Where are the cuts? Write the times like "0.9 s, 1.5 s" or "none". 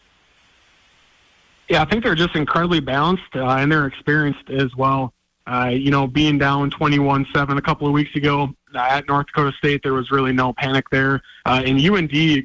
11.4 s